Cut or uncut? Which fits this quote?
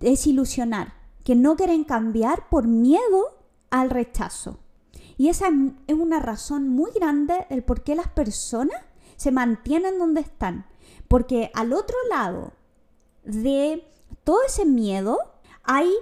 uncut